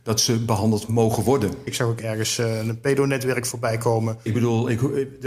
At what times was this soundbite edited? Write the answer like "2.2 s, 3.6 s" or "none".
1.7 s, 4.3 s